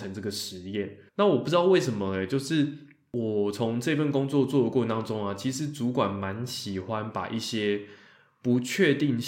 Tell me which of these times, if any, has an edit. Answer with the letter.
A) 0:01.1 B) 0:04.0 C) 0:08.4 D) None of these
A